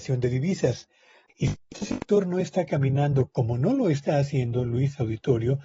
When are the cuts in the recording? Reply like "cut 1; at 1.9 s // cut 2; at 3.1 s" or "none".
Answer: cut 1; at 1.3 s